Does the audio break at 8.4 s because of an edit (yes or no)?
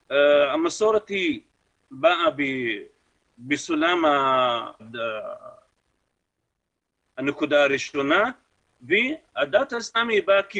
no